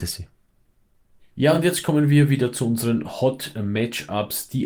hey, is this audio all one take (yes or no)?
yes